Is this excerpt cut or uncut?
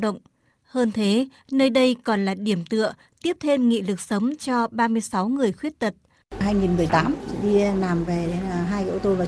cut